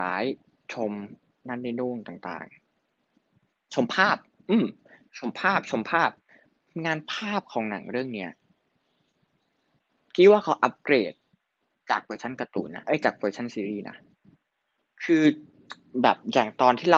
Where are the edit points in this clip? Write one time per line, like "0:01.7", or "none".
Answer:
none